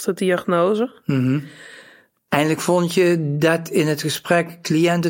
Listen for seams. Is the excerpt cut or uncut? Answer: cut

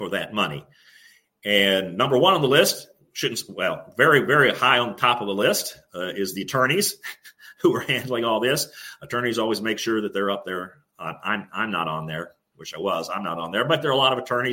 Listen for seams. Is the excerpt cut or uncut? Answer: uncut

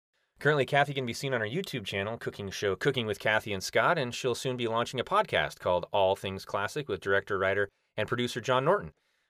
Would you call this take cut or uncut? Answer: uncut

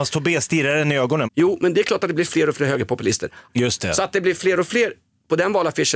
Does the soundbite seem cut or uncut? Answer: cut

